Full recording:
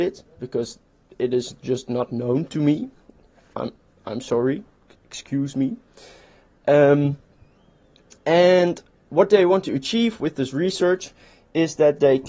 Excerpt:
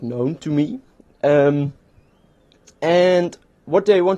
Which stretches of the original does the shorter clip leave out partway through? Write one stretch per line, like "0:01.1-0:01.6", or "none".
0:03.3-0:06.6